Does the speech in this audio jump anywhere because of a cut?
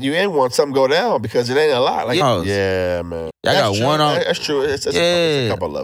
yes; 2 cuts; at 2.2 s, 3.3 s

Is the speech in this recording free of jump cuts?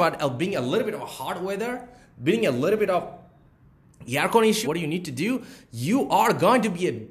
no; 1 cut; at 4.6 s

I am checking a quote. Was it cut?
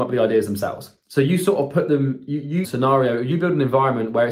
yes; 1 cut; at 2.6 s

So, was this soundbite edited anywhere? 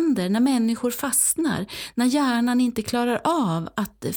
no; 0 cuts

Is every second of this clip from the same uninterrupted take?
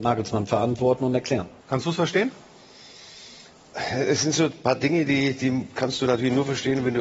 no; 1 cut; at 1.6 s

